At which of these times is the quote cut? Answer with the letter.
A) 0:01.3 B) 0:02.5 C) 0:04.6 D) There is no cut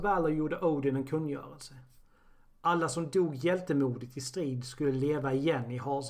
D